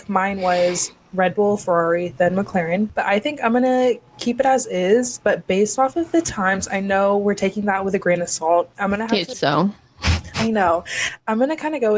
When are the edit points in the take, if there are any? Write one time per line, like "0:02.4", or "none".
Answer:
0:09.3